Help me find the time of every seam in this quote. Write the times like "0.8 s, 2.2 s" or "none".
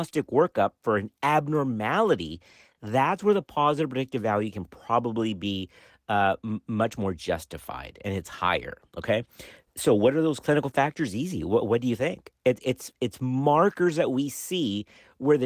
none